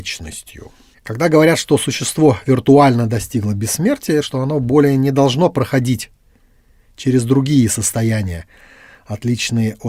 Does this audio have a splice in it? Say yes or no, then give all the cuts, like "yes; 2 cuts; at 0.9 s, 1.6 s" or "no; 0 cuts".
yes; 1 cut; at 4.2 s